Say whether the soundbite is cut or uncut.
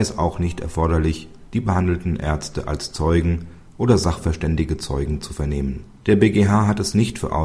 cut